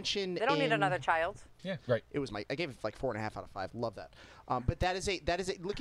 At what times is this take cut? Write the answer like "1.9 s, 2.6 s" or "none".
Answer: 1.8 s